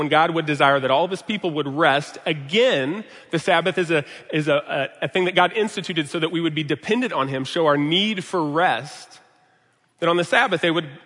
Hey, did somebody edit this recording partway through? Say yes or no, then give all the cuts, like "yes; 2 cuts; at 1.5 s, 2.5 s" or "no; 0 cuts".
no; 0 cuts